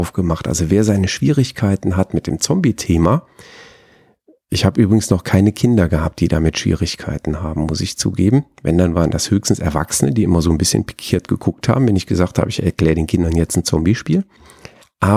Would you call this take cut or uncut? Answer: uncut